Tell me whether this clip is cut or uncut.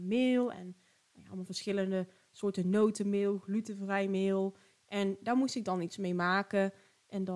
uncut